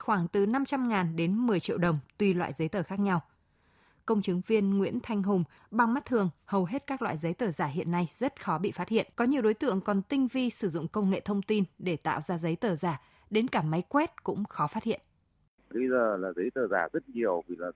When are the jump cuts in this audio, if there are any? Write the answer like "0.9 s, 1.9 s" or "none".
5.6 s, 9.1 s